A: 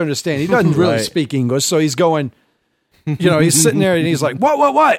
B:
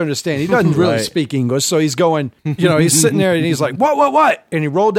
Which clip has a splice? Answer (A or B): B